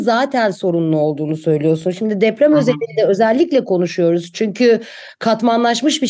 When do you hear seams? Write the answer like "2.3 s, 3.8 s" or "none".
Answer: none